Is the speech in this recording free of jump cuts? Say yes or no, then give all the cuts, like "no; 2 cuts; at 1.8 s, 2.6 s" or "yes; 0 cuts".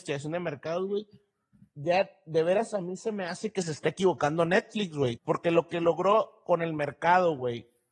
no; 1 cut; at 5.2 s